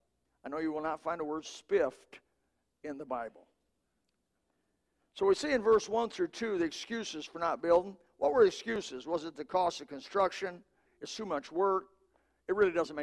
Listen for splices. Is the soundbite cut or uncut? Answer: cut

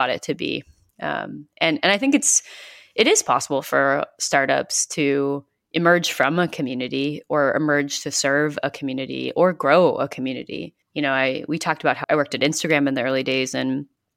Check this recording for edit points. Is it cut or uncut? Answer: cut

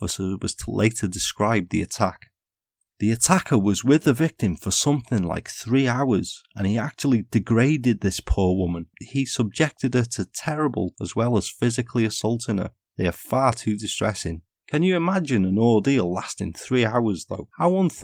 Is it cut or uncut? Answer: cut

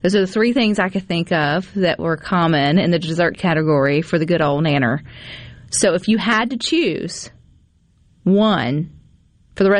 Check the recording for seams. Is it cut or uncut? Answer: uncut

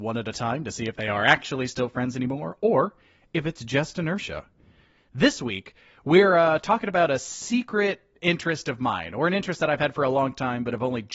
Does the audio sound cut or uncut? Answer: uncut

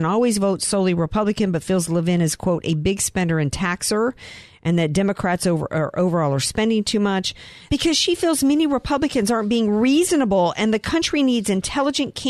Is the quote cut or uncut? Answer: cut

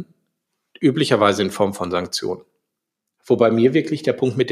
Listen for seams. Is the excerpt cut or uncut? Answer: uncut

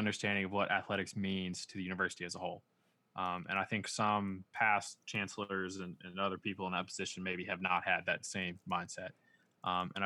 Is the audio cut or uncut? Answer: uncut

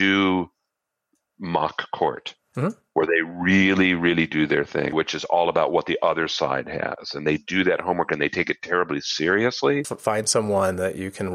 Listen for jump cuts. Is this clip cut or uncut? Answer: cut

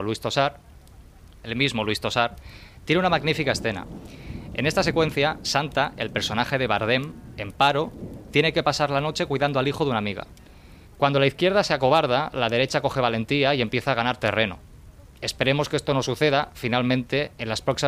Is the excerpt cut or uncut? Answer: cut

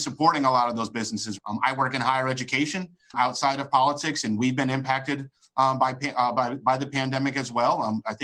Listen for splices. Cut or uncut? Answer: cut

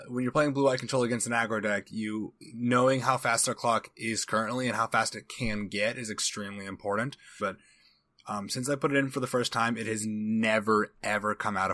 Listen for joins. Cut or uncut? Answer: cut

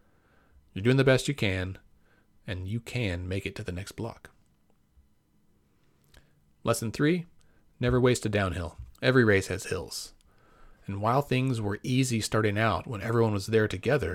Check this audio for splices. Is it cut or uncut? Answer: cut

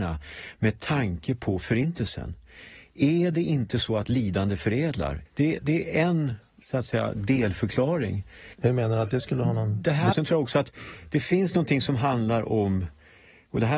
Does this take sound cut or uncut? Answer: cut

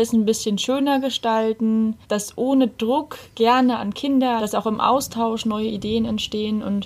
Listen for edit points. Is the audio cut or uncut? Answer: cut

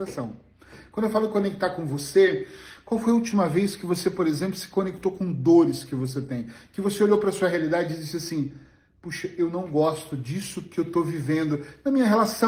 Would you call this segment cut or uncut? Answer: uncut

